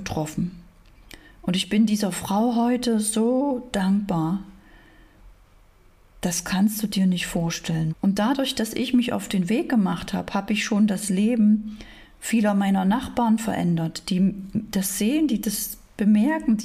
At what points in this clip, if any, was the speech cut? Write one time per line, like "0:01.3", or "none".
0:07.9